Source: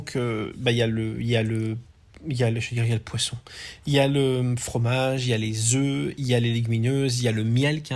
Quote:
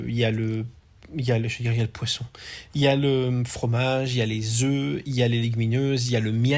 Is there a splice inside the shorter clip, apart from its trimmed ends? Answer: no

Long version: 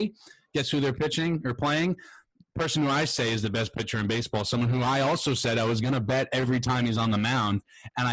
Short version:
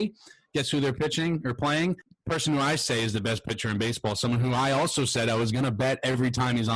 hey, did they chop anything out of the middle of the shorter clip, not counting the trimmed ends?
yes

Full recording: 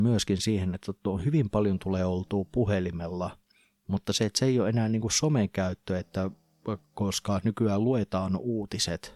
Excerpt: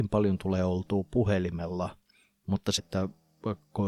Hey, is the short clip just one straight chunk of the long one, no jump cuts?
no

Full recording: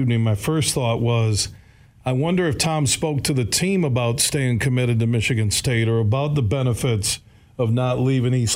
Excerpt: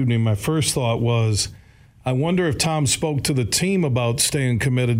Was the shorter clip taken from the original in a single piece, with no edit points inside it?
yes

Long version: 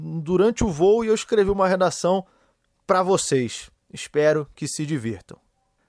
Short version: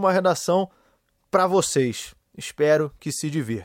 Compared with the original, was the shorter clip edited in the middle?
no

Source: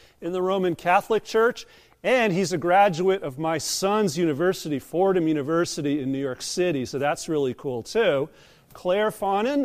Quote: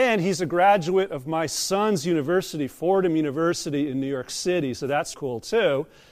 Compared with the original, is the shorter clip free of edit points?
no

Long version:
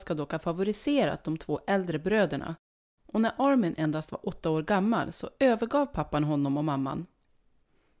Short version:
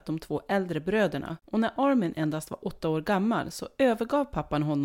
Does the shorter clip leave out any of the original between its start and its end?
yes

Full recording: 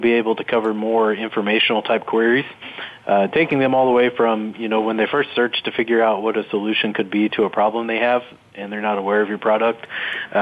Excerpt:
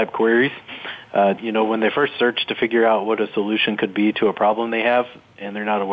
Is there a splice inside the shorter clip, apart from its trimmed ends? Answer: yes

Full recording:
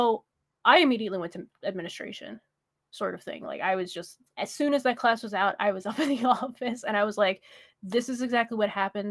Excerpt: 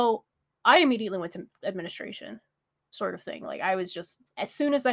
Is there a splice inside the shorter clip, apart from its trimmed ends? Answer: no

